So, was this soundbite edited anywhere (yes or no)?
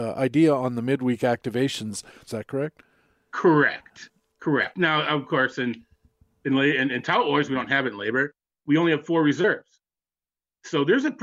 yes